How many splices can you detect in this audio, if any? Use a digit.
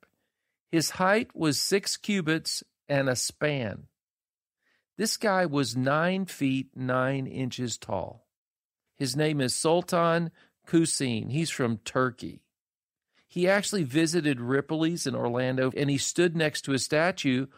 2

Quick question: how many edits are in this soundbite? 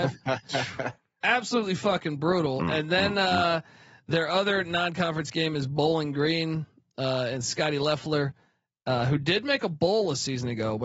0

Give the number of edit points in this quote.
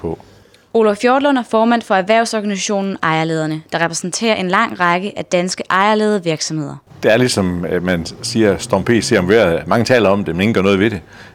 1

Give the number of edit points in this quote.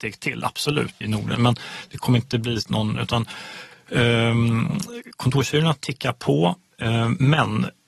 2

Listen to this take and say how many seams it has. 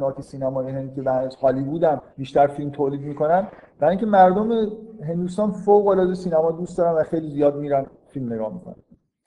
1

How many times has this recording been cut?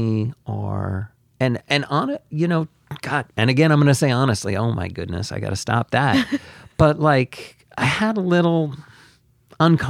0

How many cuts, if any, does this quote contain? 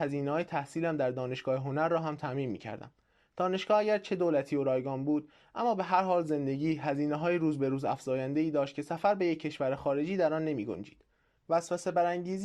1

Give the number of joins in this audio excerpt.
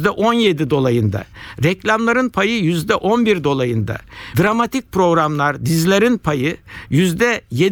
1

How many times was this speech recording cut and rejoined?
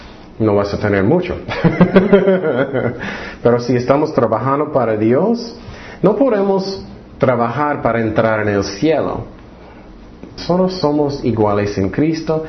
1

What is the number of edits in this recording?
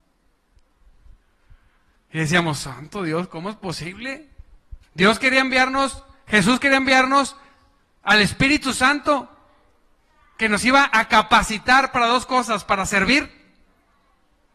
1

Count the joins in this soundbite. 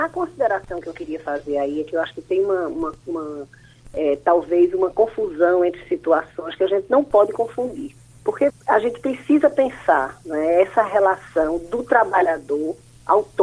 1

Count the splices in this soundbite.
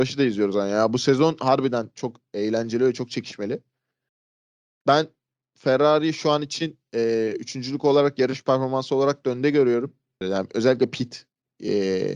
1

